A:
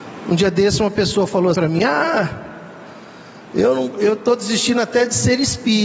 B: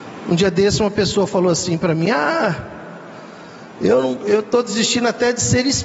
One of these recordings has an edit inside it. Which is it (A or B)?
A